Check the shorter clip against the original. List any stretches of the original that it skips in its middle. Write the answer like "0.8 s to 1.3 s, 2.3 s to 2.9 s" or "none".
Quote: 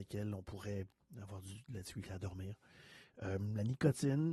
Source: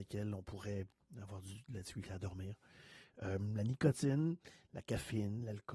none